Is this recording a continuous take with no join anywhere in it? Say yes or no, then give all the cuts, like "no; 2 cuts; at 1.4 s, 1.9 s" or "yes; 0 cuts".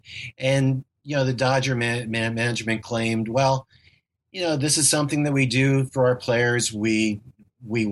yes; 0 cuts